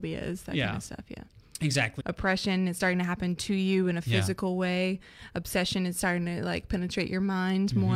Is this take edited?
yes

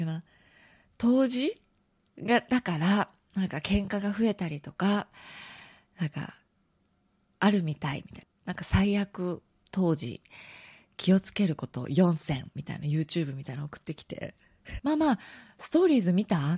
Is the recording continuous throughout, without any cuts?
no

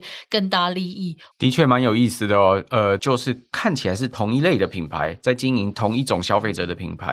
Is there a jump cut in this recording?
yes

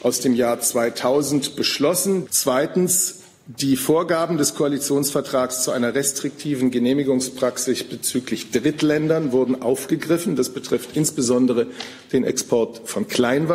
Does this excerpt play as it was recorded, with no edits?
no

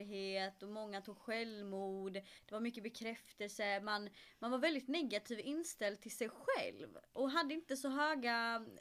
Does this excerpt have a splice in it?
yes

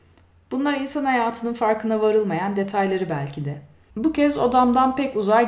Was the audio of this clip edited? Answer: yes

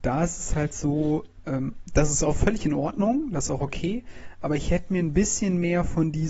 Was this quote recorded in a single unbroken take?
yes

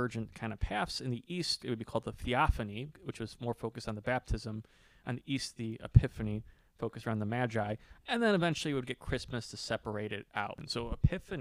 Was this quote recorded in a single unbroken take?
no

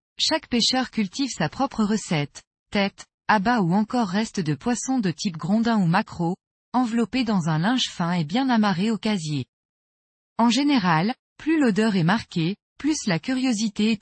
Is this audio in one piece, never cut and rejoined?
yes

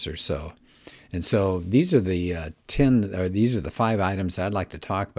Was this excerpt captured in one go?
yes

